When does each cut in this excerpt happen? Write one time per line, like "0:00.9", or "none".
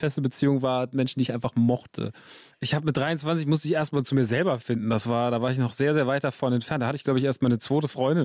0:02.5